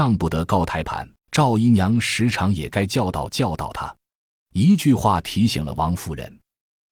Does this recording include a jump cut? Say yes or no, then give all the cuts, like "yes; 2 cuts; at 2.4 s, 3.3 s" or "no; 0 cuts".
yes; 1 cut; at 1.2 s